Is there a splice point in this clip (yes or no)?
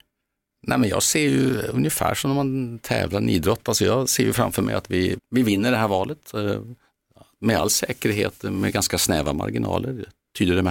yes